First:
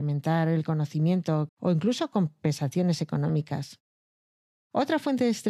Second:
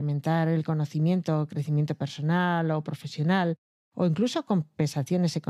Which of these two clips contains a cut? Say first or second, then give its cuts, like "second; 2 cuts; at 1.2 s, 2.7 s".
first; 1 cut; at 1.5 s